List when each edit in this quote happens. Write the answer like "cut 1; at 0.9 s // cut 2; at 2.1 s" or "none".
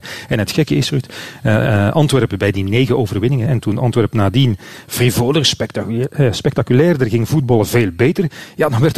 cut 1; at 3.5 s